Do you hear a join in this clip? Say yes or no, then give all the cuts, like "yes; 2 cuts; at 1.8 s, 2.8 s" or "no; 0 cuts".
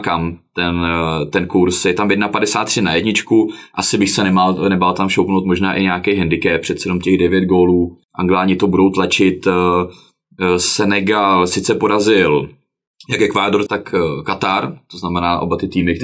yes; 2 cuts; at 8.0 s, 13.7 s